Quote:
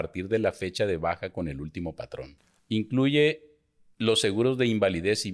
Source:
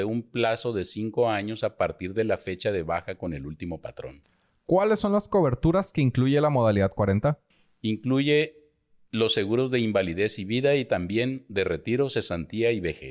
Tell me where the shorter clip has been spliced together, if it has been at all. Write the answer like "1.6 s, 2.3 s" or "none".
2.6 s